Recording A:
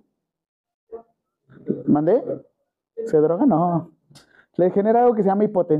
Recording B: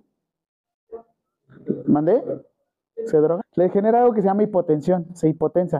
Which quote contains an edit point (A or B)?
B